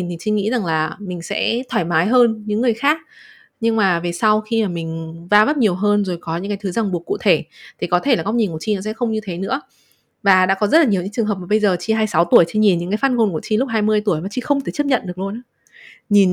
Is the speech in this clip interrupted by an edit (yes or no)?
no